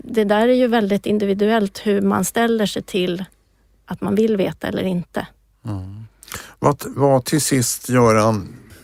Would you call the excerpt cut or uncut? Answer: uncut